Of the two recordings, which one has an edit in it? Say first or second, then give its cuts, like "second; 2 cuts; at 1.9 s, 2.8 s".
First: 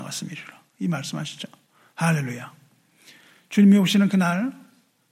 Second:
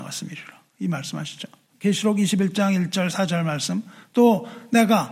second; 1 cut; at 1.7 s